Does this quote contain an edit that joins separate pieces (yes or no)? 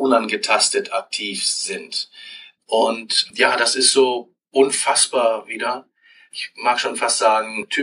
no